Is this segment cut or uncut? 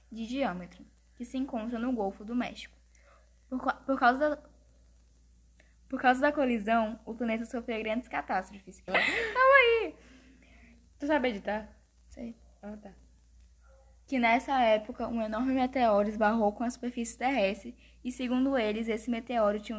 cut